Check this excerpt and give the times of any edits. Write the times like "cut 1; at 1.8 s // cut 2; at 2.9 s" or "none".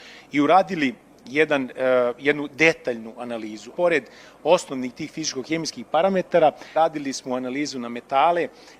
cut 1; at 3.7 s // cut 2; at 6.7 s